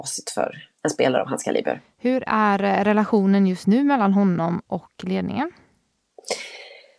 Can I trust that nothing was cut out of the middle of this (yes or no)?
yes